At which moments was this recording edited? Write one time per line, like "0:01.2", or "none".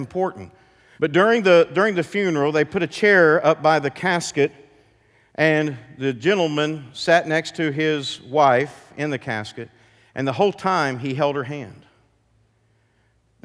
0:01.0